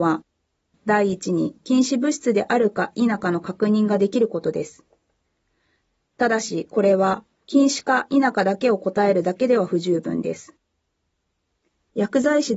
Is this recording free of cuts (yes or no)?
yes